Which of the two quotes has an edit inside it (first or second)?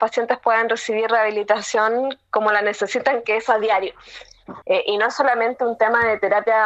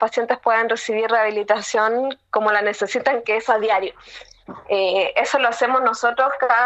first